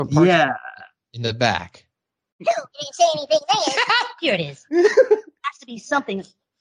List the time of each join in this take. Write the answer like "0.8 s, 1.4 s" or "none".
2.4 s